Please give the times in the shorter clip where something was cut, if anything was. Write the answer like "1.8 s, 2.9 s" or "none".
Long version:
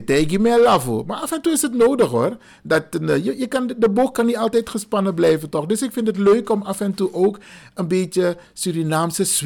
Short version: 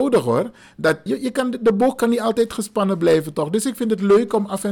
1.1 s